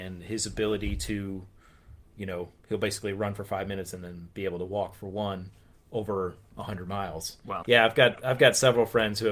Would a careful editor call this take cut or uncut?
cut